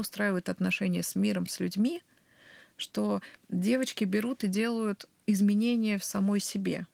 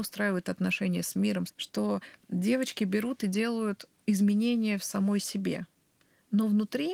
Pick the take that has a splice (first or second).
second